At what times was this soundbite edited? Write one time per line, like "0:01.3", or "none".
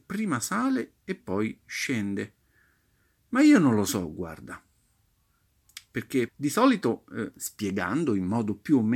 0:06.3
0:07.3